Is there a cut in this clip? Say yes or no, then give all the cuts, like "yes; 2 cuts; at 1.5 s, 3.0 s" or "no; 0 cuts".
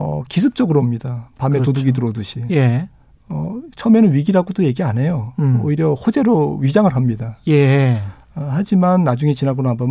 no; 0 cuts